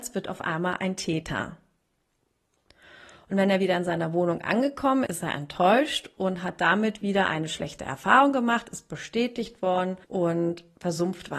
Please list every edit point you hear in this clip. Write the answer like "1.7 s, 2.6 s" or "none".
5.1 s, 10.0 s